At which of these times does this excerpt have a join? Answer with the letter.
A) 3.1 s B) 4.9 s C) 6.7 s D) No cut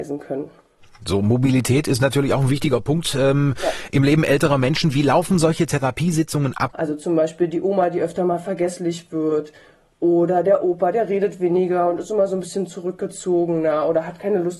C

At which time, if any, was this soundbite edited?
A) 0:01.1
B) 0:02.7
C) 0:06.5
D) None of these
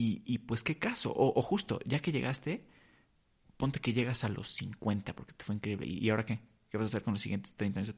D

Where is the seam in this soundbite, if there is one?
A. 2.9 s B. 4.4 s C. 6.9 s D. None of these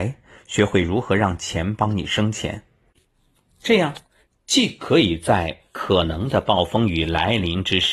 D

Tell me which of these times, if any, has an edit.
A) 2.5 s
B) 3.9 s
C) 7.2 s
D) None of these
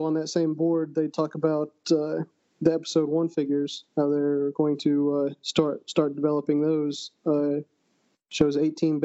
D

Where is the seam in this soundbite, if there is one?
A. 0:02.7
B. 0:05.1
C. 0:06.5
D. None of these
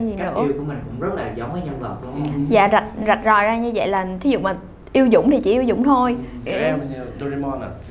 C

